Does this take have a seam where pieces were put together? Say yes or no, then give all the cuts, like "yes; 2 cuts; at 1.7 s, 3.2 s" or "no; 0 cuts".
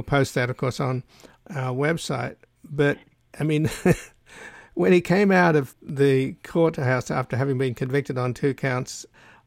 yes; 1 cut; at 5.7 s